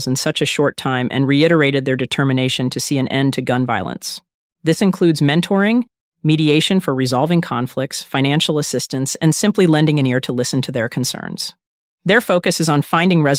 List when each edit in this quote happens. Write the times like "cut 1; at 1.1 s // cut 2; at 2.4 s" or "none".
cut 1; at 4.5 s